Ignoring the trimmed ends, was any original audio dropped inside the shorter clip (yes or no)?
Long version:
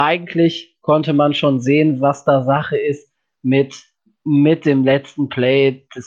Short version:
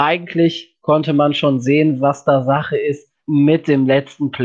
yes